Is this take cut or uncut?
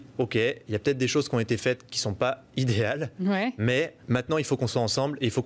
cut